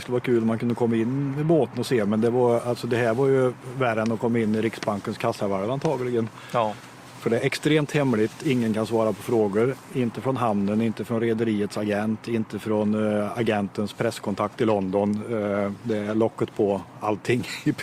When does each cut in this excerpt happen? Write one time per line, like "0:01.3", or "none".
none